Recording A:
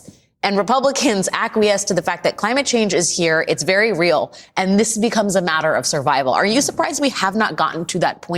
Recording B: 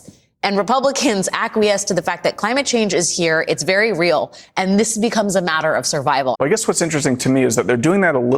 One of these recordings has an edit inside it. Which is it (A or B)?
B